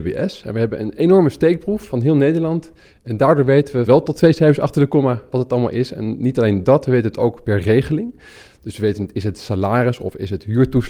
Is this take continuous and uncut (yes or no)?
yes